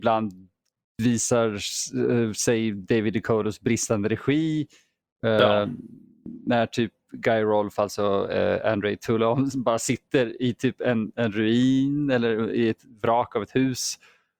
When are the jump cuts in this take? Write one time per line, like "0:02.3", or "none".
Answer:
none